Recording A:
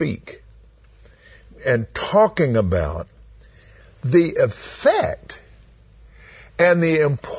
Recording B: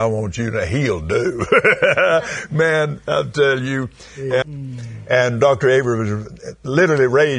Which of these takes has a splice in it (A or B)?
B